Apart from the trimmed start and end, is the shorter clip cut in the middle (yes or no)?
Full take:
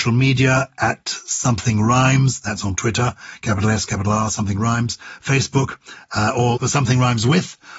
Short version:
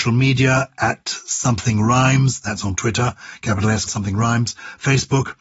yes